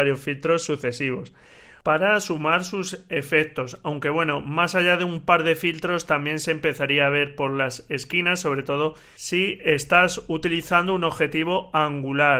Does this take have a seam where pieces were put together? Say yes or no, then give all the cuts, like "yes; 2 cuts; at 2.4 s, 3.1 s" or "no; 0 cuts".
no; 0 cuts